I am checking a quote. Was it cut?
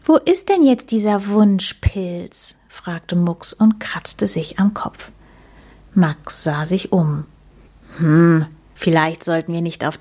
no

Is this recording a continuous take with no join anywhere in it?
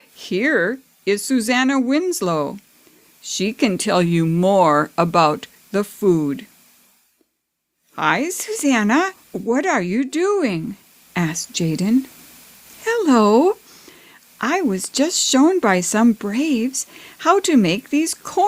no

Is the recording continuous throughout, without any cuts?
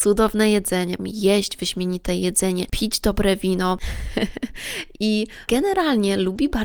no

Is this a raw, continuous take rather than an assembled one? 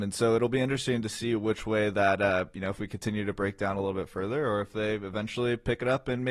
yes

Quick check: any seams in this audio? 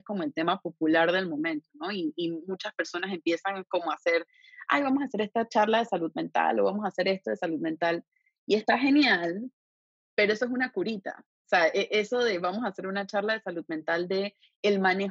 no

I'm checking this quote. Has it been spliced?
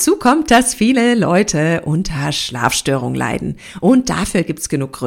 no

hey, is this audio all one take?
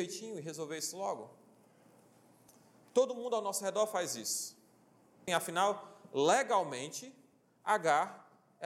no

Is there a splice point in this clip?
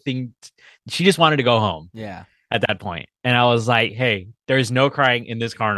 no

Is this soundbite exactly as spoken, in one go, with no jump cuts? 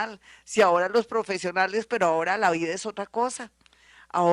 no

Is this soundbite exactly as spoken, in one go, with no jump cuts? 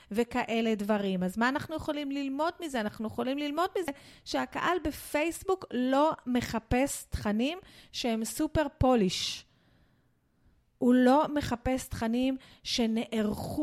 yes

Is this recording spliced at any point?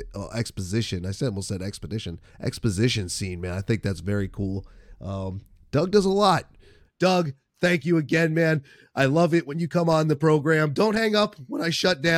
yes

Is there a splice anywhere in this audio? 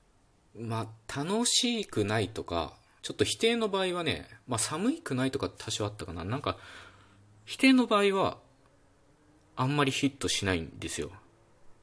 yes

